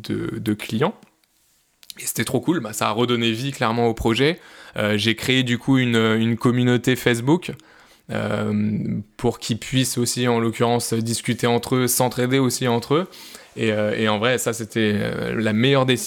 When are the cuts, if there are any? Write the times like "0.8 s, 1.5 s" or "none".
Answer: none